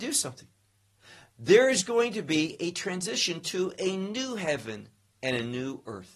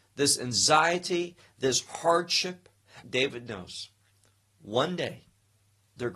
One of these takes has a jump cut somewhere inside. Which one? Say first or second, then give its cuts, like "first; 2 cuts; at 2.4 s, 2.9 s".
second; 1 cut; at 3.0 s